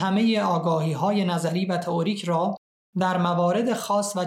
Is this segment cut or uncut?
uncut